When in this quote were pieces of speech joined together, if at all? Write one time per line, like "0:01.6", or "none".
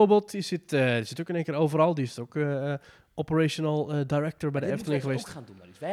none